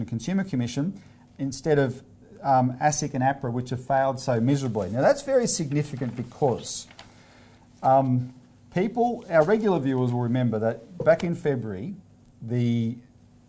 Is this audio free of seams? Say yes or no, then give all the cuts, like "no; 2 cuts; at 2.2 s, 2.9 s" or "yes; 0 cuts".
yes; 0 cuts